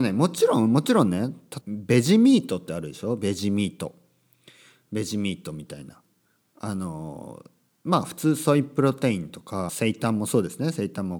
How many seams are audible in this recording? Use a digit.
2